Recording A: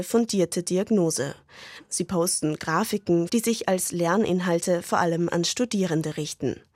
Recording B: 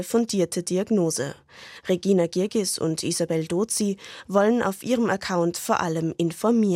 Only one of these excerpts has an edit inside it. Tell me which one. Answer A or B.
A